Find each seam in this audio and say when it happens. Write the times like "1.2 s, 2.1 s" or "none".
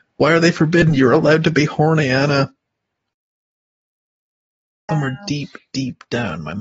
4.9 s